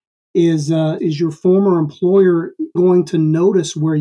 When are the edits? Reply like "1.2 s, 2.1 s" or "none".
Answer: 1.0 s, 2.8 s